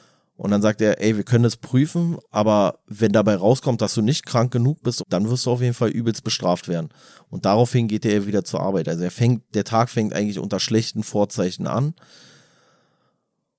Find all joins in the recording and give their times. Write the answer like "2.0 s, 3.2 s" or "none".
5.0 s